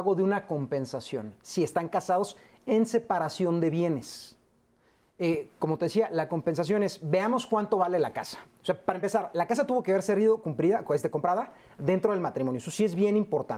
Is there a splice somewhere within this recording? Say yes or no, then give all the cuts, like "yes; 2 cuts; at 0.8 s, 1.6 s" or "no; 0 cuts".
no; 0 cuts